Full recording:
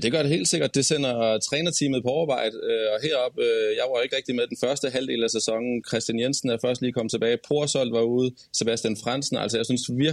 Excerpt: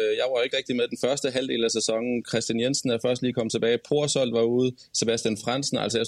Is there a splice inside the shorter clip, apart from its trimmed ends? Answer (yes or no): no